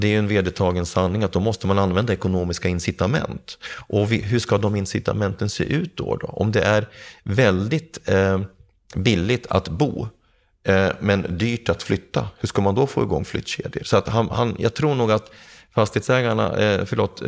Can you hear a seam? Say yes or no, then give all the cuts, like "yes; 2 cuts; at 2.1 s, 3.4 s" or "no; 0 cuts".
no; 0 cuts